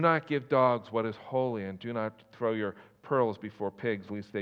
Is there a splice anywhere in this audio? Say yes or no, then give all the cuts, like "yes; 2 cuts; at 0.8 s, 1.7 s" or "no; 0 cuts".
no; 0 cuts